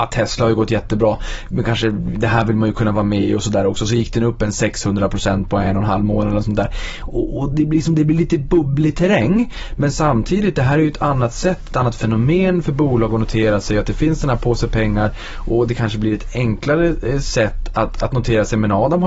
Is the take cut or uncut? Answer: uncut